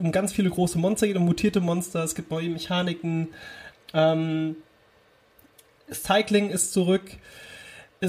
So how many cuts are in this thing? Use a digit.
1